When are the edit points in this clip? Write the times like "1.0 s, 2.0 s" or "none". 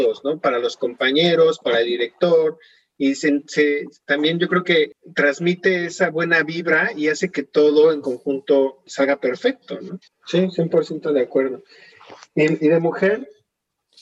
8.9 s, 10.1 s